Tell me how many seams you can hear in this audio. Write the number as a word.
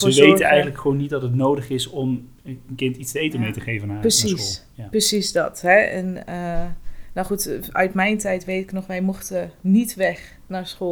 zero